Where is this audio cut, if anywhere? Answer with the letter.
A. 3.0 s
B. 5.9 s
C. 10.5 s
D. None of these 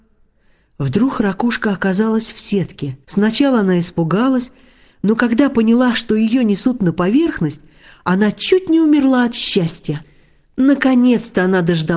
A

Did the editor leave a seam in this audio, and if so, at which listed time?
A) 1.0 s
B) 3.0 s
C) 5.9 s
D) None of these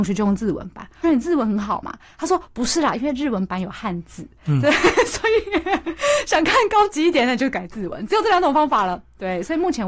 A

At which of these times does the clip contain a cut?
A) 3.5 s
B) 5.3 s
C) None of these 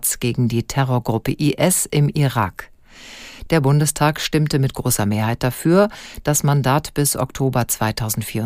C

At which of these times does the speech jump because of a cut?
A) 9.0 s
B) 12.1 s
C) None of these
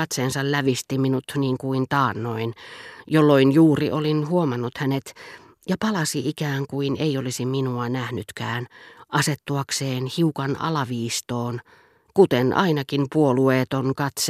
B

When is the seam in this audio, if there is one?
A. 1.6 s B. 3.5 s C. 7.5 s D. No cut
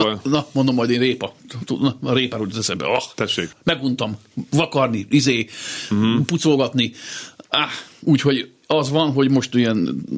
B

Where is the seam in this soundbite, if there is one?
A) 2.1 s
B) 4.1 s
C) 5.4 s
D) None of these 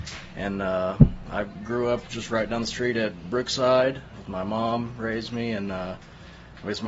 B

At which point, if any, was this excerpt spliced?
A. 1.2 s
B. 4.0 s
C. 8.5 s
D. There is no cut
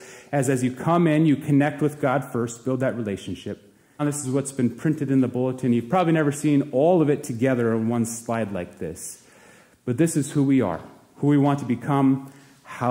B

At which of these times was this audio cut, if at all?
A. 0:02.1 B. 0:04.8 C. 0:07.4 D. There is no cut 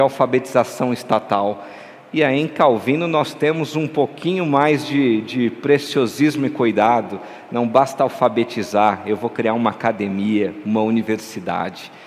D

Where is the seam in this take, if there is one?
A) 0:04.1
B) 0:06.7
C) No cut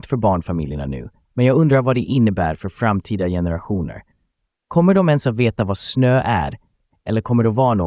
C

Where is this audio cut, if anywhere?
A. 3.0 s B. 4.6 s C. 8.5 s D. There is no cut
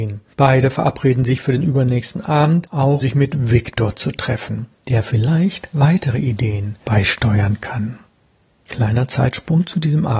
A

